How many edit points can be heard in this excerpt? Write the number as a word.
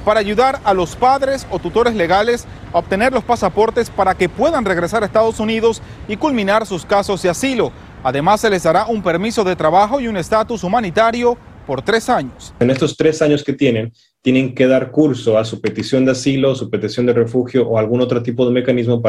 zero